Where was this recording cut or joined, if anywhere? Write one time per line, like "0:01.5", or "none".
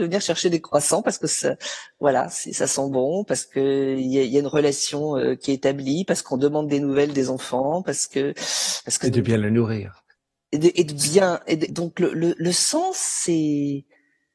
0:09.0
0:11.7

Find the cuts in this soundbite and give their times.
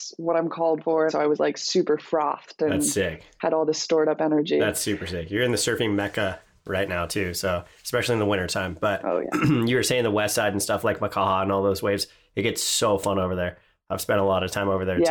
0:01.1

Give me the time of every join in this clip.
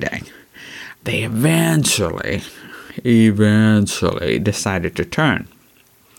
0:00.9

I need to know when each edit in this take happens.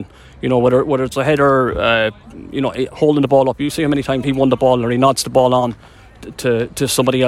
0:04.2

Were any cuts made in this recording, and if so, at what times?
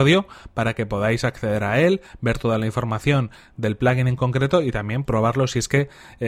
0:05.0

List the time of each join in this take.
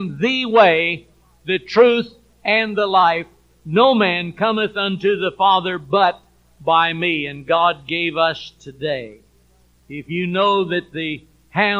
0:09.8

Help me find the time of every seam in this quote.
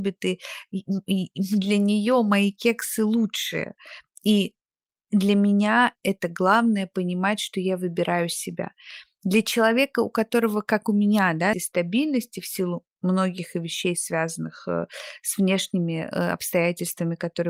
0:11.5

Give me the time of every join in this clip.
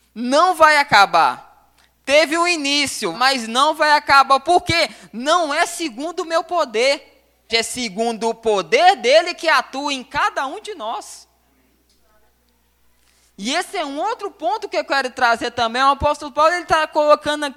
0:03.1
0:07.5

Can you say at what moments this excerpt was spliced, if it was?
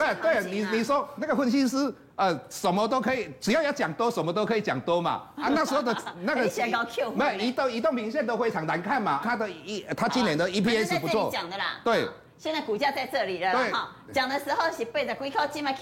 0:09.2

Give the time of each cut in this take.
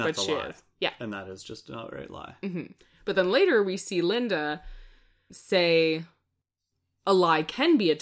0:05.3

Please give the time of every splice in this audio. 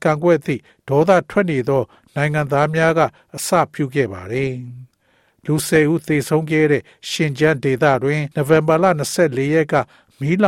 0:08.3

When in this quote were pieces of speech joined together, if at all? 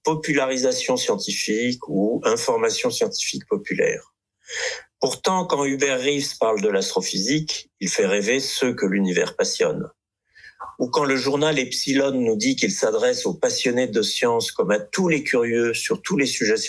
none

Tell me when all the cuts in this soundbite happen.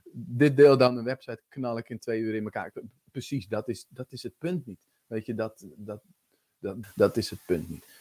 0:06.8

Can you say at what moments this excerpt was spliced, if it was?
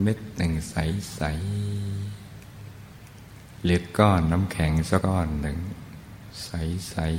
0:05.0

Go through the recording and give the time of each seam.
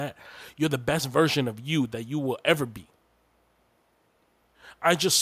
none

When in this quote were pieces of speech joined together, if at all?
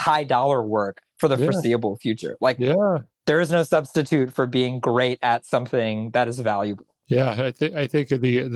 none

